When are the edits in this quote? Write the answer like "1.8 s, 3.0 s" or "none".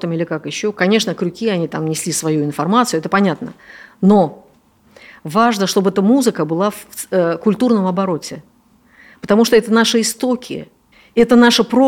none